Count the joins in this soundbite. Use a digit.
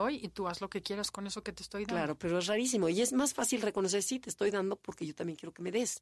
0